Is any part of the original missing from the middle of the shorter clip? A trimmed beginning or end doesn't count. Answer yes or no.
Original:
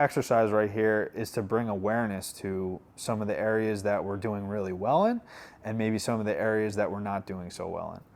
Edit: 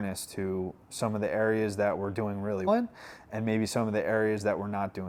yes